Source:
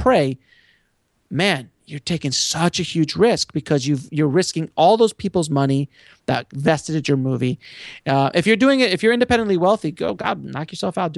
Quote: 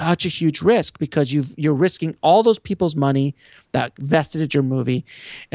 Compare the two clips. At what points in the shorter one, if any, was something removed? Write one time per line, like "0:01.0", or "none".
none